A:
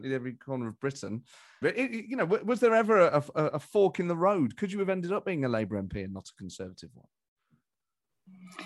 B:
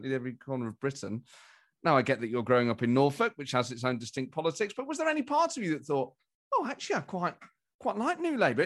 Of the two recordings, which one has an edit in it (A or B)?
A